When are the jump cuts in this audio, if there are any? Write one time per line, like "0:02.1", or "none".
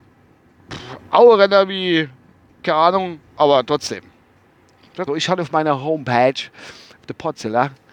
0:03.3
0:05.1